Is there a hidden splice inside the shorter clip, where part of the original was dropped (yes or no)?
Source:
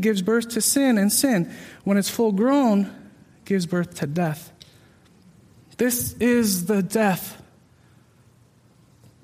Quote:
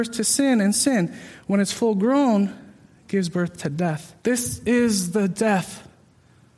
yes